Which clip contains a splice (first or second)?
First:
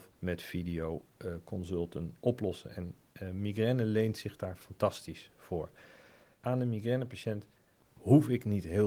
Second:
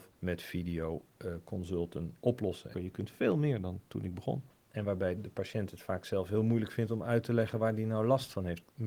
second